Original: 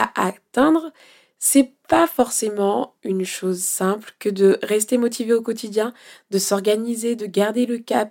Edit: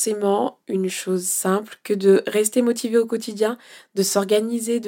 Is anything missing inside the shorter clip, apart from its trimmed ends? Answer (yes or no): no